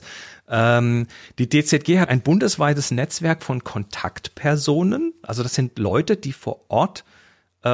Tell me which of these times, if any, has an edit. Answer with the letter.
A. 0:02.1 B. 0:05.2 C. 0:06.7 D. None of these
A